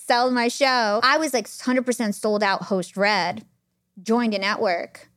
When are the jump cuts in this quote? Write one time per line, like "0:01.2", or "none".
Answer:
0:01.0